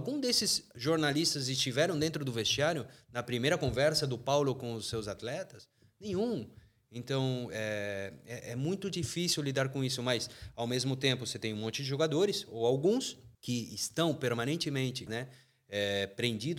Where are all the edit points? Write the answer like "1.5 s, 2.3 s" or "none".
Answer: 13.3 s, 15.1 s